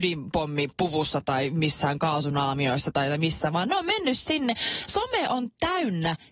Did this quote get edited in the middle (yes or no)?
no